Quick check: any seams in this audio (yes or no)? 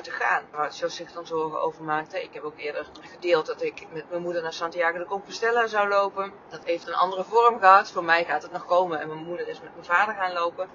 no